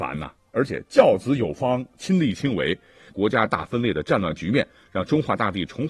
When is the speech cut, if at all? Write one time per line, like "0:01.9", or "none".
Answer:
0:03.1